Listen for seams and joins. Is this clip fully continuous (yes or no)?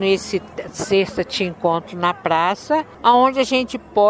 yes